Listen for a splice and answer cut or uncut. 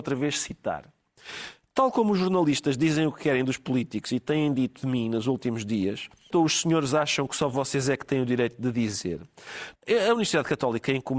cut